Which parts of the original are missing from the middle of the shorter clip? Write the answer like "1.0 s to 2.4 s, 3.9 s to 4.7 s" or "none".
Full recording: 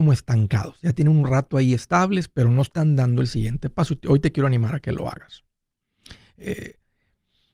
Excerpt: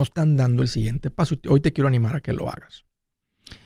none